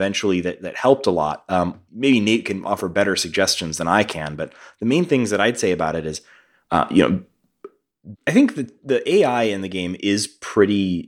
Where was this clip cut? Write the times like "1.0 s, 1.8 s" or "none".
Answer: 1.9 s, 8.1 s